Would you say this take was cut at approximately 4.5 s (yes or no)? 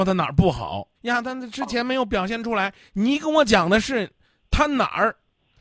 no